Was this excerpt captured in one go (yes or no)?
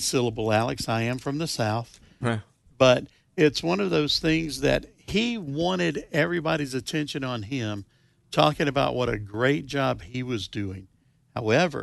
no